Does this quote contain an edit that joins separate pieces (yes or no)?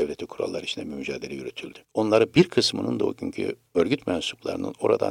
yes